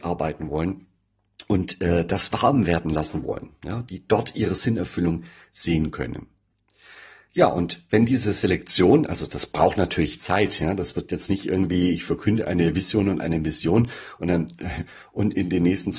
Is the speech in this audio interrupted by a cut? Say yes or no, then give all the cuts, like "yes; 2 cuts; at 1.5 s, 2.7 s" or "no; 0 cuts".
no; 0 cuts